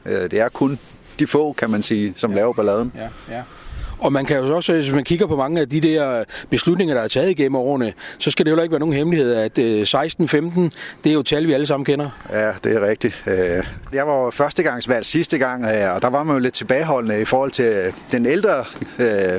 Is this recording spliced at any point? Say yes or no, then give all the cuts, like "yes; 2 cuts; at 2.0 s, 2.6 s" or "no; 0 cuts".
yes; 1 cut; at 13.9 s